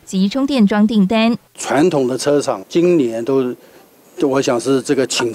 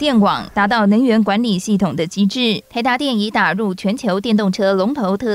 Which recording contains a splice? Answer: first; 2 cuts; at 1.5 s, 2.6 s

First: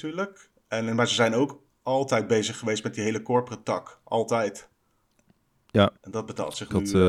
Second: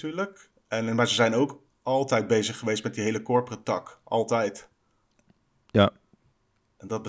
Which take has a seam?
first; 1 cut; at 6.0 s

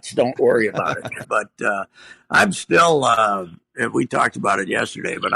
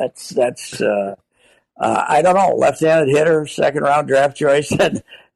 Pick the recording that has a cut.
first; 1 cut; at 1.2 s

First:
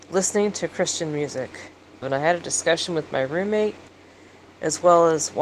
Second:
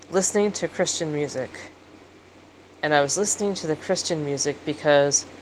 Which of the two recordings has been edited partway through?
first; 1 cut; at 2.0 s

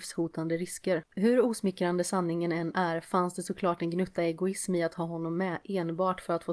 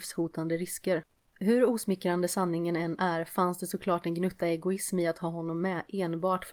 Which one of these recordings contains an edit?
first; 1 cut; at 1.1 s

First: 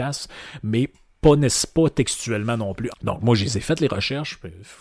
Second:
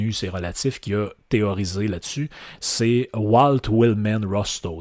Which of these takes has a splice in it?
first; 1 cut; at 2.9 s

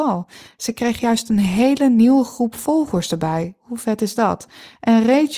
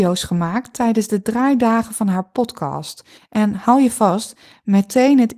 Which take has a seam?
second; 1 cut; at 3.2 s

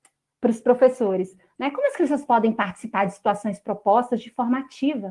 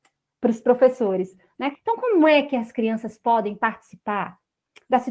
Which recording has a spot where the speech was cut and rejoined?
second; 1 cut; at 1.7 s

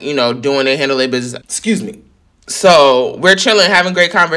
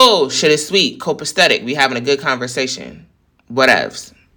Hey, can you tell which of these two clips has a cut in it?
first; 1 cut; at 1.4 s

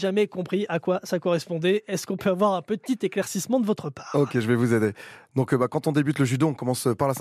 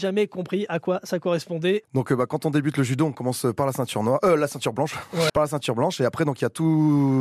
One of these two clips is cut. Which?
second; 2 cuts; at 1.8 s, 5.3 s

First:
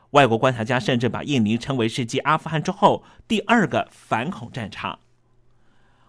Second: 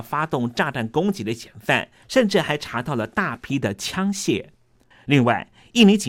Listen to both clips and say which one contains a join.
second; 2 cuts; at 2.0 s, 4.9 s

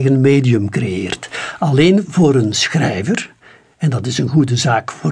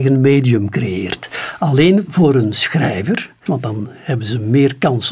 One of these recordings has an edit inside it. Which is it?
second; 1 cut; at 3.5 s

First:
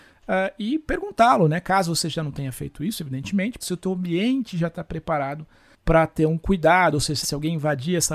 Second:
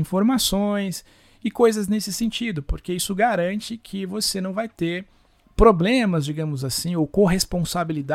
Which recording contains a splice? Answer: first; 2 cuts; at 3.6 s, 7.2 s

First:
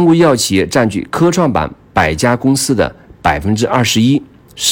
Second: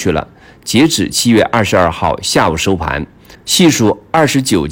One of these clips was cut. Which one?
second; 1 cut; at 3.3 s

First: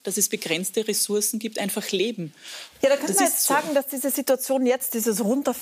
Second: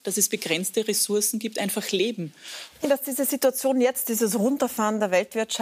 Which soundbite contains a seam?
second; 1 cut; at 2.8 s

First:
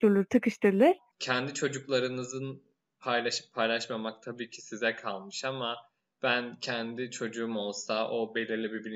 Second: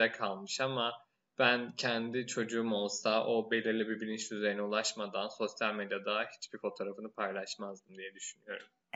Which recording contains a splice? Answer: first; 1 cut; at 1.1 s

